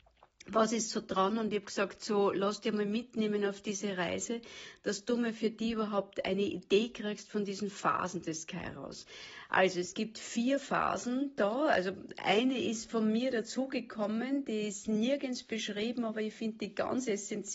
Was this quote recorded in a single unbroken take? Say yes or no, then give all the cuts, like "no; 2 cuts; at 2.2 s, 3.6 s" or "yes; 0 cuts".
yes; 0 cuts